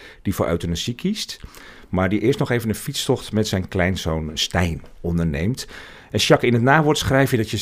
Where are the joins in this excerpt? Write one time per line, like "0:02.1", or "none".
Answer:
none